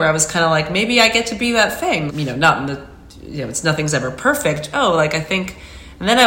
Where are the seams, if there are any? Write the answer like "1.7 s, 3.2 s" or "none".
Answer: 2.1 s, 4.7 s